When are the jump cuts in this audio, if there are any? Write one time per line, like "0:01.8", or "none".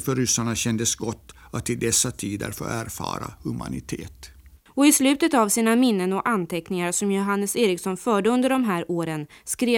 0:04.7